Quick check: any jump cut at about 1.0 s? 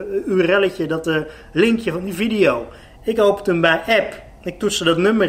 no; 0 cuts

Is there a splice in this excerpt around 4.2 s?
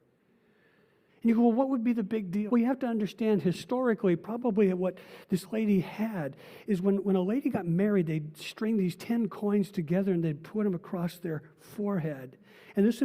no; 2 cuts; at 1.1 s, 2.5 s

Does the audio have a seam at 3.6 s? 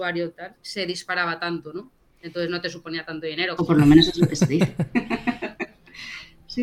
yes; 1 cut; at 3.6 s

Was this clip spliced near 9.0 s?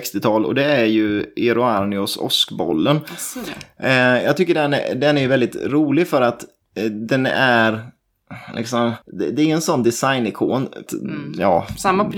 yes; 2 cuts; at 9.0 s, 10.9 s

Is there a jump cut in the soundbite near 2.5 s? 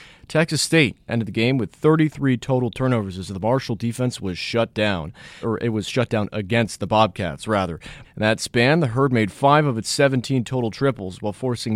no; 2 cuts; at 5.4 s, 8.0 s

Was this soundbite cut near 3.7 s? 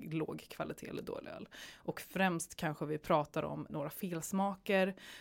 yes; 1 cut; at 3.7 s

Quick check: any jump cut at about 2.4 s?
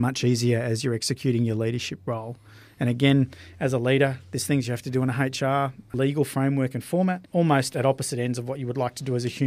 no; 0 cuts

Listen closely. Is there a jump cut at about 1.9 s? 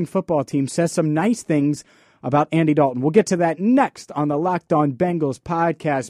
no; 0 cuts

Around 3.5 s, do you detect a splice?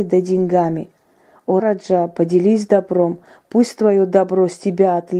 no; 1 cut; at 1.6 s

